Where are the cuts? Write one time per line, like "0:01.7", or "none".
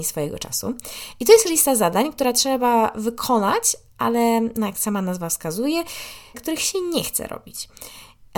0:06.3